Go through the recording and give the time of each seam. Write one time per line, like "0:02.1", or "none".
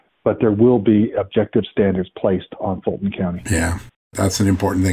none